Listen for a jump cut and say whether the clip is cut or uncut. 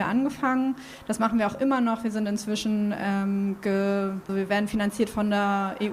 cut